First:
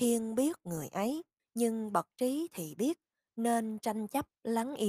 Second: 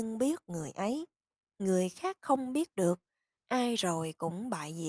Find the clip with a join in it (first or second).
first